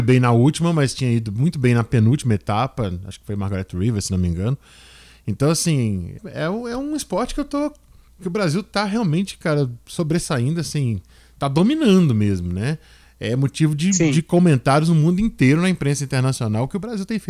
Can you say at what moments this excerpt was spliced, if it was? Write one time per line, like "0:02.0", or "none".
0:06.2